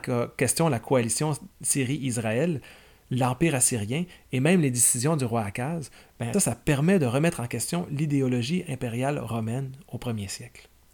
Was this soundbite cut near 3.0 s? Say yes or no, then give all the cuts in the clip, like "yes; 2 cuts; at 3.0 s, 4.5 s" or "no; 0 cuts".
no; 1 cut; at 6.3 s